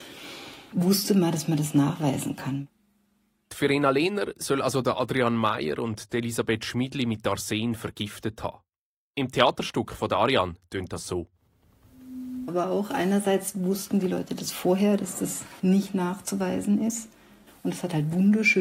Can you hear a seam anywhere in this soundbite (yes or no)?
yes